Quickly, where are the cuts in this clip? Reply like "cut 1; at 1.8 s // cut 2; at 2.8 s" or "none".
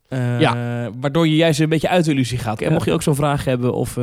cut 1; at 2.6 s